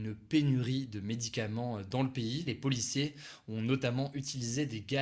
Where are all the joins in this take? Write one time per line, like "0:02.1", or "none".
0:02.5